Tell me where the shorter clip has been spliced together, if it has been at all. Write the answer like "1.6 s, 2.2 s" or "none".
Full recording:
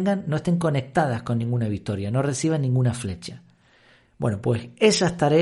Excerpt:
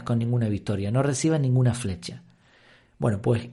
none